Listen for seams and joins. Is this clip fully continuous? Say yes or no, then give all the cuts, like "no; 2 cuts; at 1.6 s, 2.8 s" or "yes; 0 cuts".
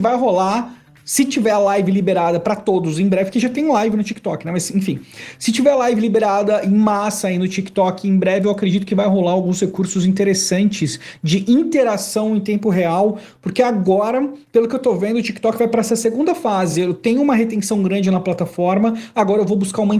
yes; 0 cuts